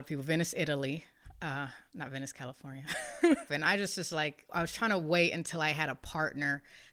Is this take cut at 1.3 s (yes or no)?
no